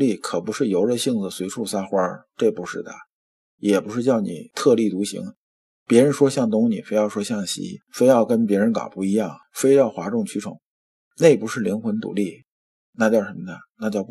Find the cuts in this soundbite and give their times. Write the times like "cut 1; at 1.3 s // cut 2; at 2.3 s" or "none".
none